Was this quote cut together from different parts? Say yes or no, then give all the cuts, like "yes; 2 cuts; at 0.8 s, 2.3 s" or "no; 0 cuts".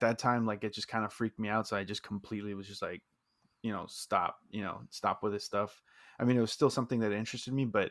no; 0 cuts